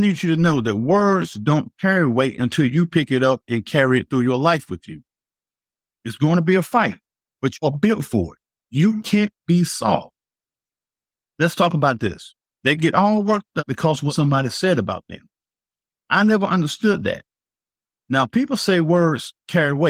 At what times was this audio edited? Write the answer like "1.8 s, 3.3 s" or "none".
5.9 s, 12.5 s